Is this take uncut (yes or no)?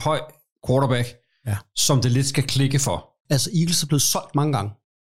no